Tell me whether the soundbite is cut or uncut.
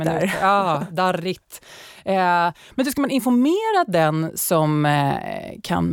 uncut